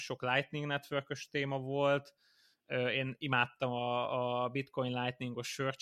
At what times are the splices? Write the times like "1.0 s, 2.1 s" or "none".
none